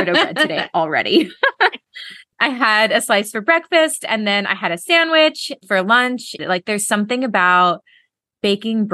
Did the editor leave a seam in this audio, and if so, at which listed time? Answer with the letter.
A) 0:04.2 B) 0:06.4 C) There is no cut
B